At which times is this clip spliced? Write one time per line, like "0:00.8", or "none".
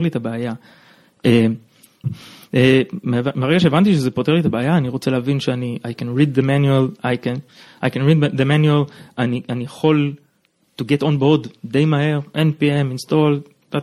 0:02.0